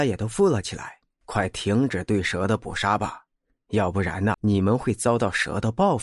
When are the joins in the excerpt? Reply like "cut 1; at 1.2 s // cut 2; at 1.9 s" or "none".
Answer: cut 1; at 4.3 s

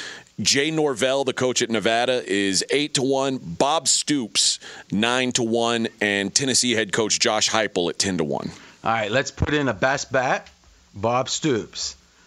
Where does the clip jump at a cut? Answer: none

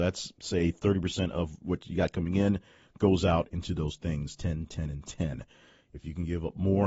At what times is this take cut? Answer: none

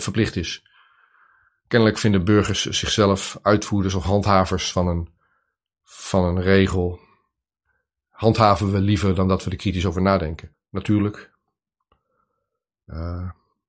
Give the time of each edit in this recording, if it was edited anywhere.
cut 1; at 10.5 s

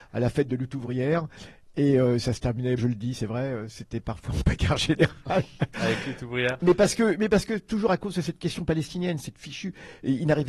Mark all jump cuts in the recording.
cut 1; at 2.8 s

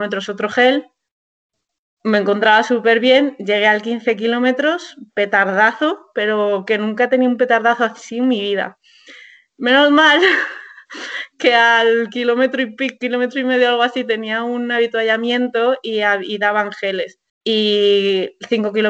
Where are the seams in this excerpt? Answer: cut 1; at 17.3 s

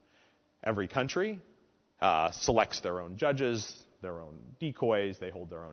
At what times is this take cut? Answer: none

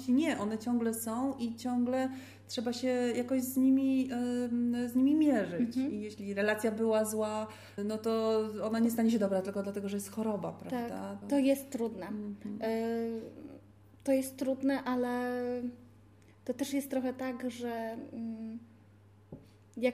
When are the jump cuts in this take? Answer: cut 1; at 7.8 s // cut 2; at 11.2 s

